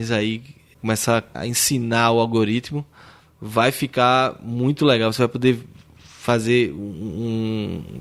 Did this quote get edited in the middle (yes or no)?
no